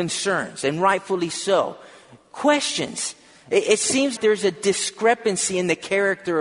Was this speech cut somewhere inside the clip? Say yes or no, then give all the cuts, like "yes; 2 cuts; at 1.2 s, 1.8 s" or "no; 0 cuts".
yes; 1 cut; at 4.2 s